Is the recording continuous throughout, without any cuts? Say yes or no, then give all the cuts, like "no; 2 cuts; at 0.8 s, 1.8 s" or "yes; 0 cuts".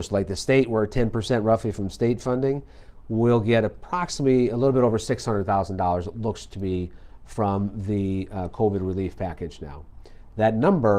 yes; 0 cuts